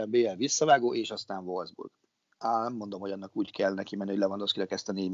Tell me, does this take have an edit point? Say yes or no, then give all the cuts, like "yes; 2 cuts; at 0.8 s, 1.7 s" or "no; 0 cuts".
no; 0 cuts